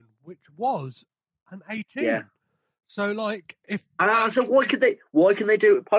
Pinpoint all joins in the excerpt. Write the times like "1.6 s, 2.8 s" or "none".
none

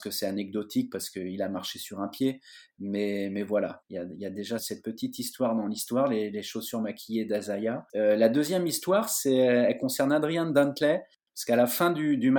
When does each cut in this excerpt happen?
4.6 s

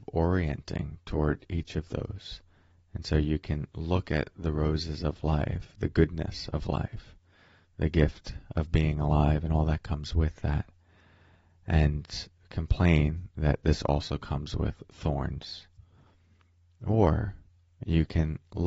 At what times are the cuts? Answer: none

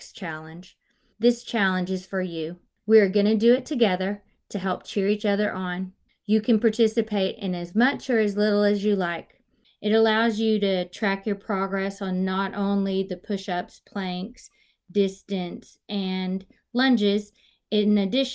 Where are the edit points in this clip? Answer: 1.1 s, 9.6 s

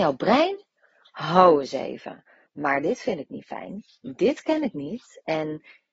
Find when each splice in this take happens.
none

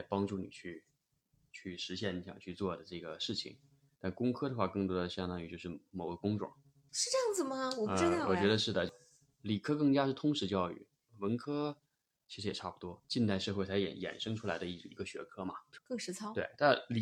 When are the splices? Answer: 13.0 s

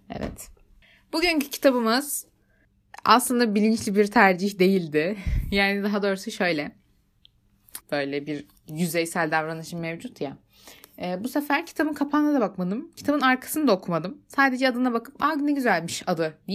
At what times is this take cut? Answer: 7.8 s

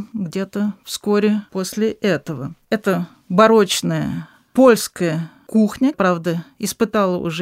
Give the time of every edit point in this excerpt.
5.9 s

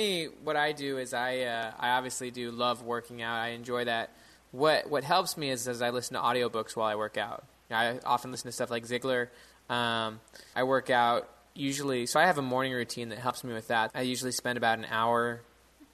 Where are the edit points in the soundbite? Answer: 10.5 s, 13.9 s

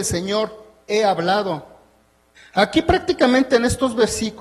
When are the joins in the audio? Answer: 2.4 s

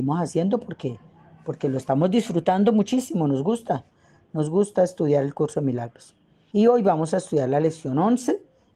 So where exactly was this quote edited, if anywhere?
6.5 s

